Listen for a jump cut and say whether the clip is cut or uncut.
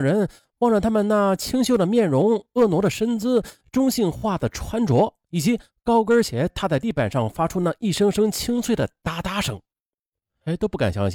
uncut